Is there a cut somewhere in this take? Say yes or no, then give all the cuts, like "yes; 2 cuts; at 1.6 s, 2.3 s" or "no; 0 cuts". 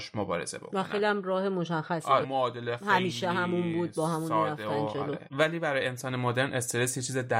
yes; 1 cut; at 2.2 s